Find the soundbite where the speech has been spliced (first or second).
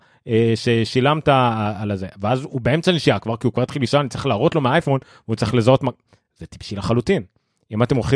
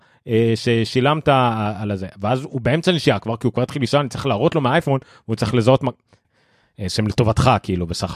second